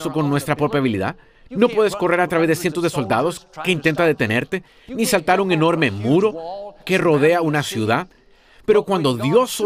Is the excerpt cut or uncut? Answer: uncut